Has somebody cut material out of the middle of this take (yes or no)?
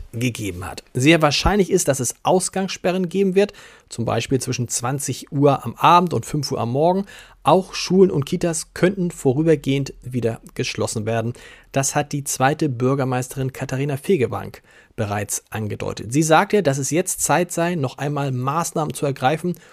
no